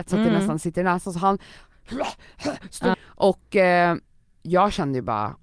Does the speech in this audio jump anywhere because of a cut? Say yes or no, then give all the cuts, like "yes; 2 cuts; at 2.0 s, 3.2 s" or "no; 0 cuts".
yes; 1 cut; at 2.9 s